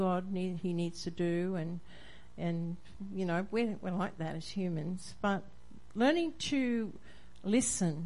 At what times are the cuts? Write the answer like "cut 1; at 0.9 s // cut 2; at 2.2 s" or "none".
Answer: none